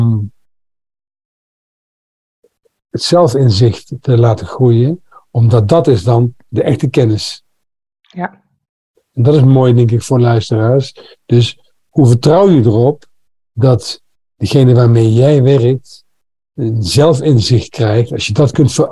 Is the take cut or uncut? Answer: uncut